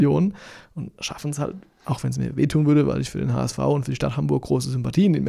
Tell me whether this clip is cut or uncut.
uncut